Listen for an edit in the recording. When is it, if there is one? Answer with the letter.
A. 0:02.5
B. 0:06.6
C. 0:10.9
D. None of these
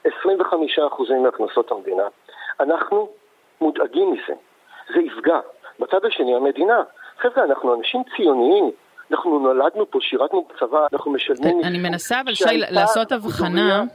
C